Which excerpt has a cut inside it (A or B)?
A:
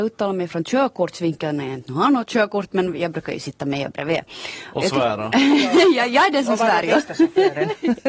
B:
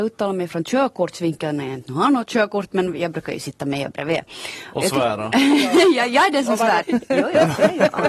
B